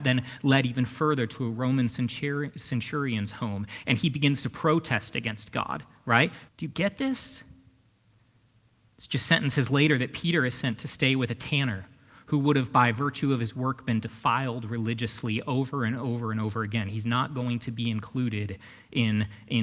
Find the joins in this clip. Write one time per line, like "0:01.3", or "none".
0:06.5
0:08.9